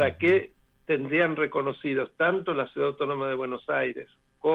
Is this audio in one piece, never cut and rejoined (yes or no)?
yes